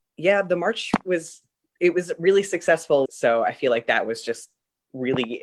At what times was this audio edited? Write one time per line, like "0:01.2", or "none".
0:03.1